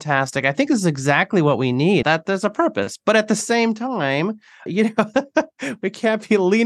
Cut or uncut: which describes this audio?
cut